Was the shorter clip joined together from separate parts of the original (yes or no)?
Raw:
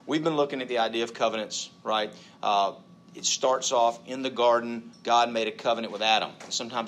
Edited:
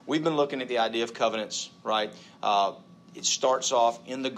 no